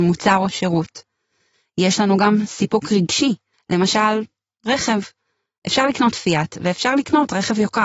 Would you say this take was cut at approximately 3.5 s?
yes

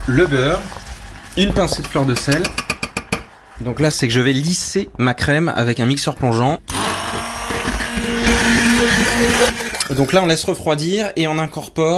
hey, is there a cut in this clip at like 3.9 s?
yes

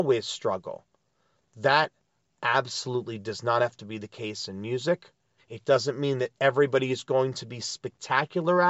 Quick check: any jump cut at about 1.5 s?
no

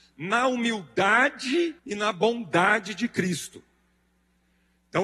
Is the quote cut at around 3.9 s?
no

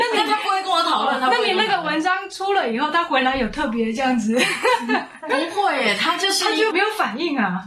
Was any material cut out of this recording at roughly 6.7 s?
yes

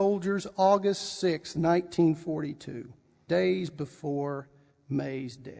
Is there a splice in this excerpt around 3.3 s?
yes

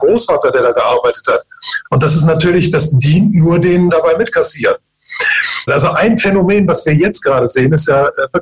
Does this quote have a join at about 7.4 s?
no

